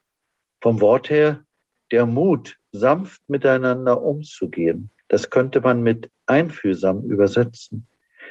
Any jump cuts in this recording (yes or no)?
yes